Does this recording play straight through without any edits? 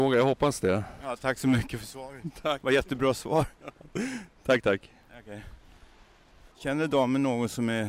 no; 1 cut; at 6.5 s

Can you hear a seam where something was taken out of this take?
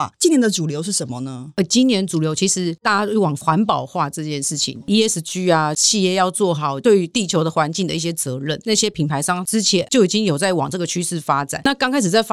no; 0 cuts

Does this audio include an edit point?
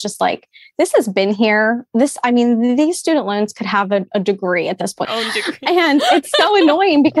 yes; 1 cut; at 5.0 s

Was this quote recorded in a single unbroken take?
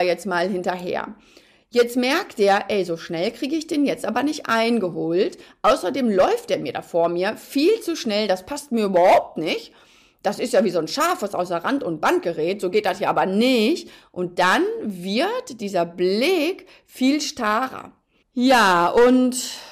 no; 1 cut; at 18.2 s

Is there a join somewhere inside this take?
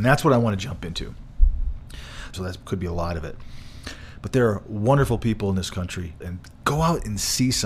yes; 2 cuts; at 2.3 s, 6.2 s

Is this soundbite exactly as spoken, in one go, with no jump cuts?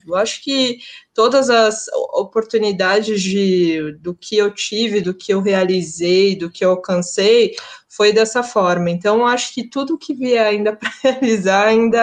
no; 1 cut; at 5.0 s

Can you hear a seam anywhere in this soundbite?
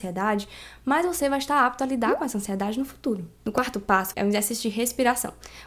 yes; 1 cut; at 4.1 s

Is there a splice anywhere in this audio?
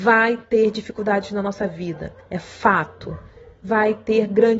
no; 0 cuts

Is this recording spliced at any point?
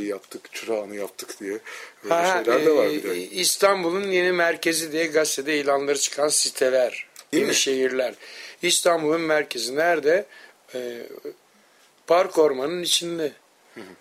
yes; 1 cut; at 7.3 s

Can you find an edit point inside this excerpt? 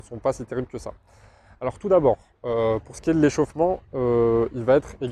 no; 0 cuts

